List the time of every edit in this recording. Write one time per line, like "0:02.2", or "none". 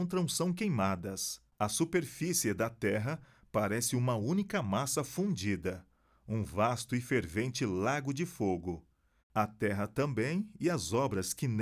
0:01.5
0:09.2